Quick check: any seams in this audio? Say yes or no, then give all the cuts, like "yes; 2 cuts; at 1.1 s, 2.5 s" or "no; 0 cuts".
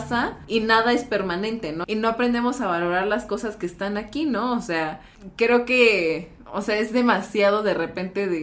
yes; 1 cut; at 1.8 s